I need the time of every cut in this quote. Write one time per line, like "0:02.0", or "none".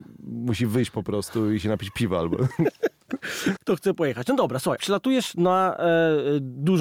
0:03.6
0:04.8